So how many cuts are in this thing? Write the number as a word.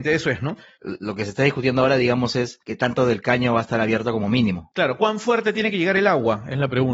zero